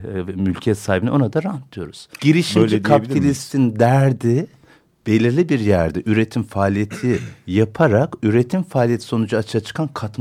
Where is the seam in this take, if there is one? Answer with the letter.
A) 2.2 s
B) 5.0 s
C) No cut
A